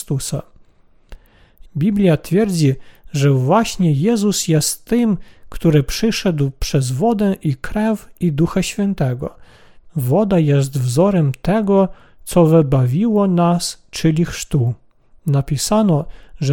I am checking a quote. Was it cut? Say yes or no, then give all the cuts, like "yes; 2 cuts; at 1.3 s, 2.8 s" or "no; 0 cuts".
yes; 2 cuts; at 1.7 s, 9.9 s